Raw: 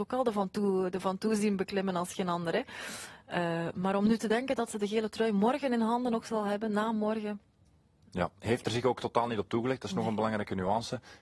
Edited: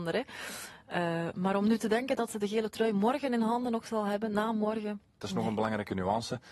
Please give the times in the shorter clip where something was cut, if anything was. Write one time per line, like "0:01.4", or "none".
0:05.2